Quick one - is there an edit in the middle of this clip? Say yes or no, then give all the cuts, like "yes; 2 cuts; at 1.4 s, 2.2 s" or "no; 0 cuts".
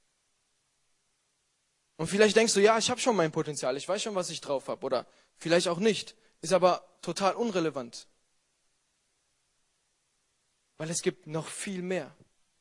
no; 0 cuts